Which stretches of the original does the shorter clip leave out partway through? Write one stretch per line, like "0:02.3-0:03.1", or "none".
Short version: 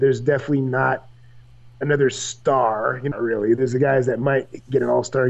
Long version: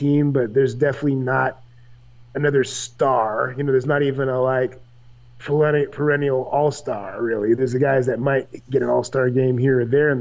0:03.7-0:07.1